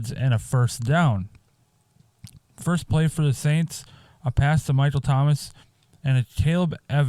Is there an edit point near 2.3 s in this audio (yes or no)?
yes